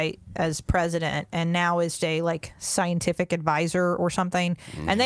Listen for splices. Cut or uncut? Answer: cut